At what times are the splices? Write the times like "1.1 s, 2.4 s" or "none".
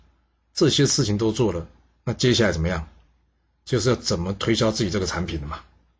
none